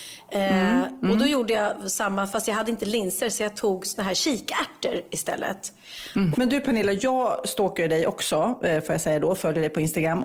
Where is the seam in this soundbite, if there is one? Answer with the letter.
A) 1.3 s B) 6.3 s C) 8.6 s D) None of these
B